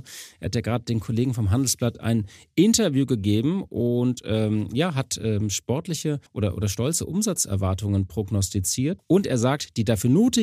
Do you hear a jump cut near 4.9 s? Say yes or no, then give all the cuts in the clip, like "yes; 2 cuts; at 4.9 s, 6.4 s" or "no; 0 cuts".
no; 2 cuts; at 6.3 s, 9.0 s